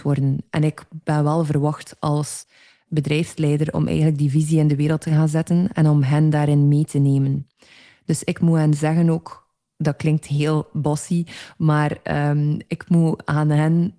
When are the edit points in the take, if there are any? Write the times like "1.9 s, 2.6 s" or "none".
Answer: none